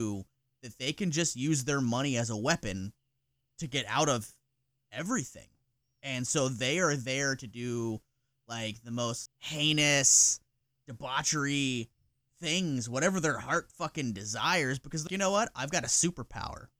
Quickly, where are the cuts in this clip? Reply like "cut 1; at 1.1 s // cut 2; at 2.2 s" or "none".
cut 1; at 9.3 s // cut 2; at 15.1 s